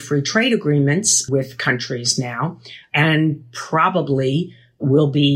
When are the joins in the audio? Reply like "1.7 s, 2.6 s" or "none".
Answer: none